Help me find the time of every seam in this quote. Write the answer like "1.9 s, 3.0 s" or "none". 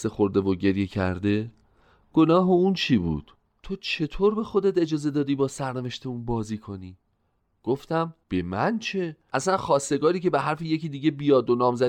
none